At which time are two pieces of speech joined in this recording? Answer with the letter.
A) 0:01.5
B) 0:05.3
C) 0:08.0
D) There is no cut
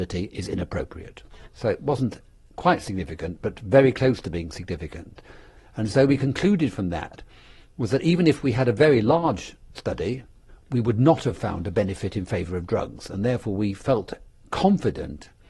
A